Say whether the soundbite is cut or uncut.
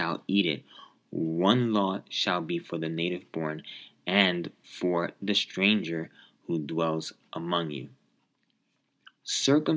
uncut